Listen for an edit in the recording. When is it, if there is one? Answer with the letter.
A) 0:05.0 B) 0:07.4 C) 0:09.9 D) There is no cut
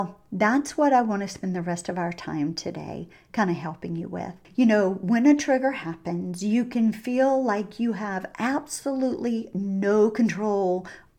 D